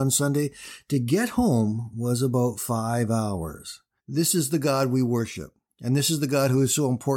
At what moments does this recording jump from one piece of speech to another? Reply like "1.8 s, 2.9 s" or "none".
4.0 s